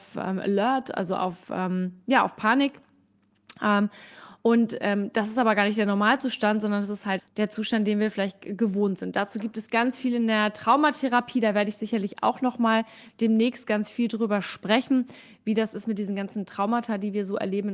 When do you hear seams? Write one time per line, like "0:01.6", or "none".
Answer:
0:07.2